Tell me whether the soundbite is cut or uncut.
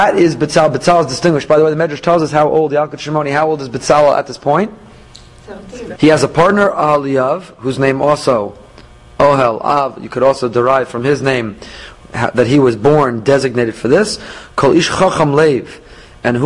cut